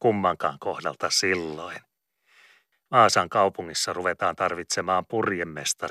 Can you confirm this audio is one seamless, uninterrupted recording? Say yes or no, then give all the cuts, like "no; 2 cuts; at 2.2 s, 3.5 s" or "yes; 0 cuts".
no; 1 cut; at 2.7 s